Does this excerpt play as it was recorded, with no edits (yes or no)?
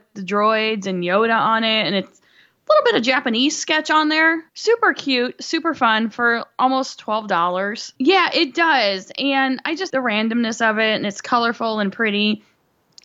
no